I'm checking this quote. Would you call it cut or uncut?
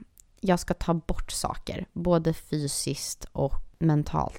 uncut